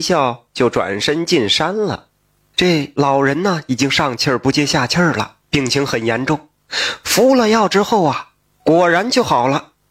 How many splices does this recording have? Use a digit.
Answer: 1